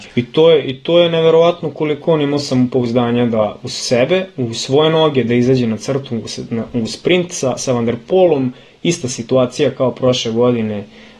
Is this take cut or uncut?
uncut